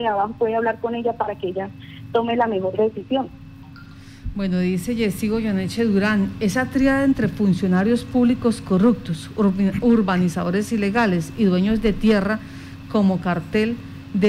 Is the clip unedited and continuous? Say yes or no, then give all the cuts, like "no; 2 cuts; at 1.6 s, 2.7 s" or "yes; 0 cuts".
yes; 0 cuts